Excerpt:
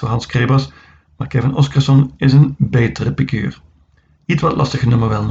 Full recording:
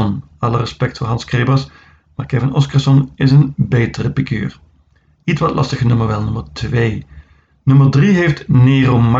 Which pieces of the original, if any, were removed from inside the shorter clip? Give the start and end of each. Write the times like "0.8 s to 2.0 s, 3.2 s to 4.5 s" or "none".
none